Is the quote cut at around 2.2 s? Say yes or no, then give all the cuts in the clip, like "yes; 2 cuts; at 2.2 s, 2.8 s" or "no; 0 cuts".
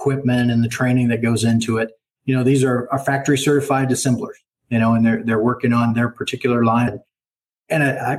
no; 1 cut; at 6.9 s